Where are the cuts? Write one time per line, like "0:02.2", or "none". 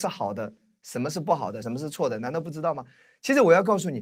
0:01.6